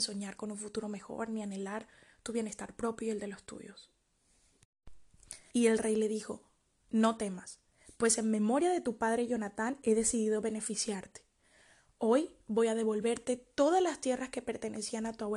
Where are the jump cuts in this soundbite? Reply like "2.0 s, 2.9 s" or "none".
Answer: 5.5 s